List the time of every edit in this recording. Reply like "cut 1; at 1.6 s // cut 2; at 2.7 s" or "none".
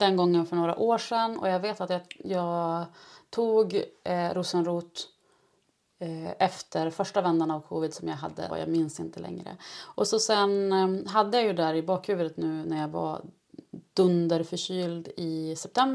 cut 1; at 8.5 s